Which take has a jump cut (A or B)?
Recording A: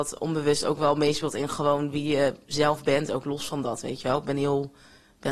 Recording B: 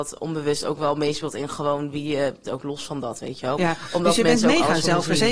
B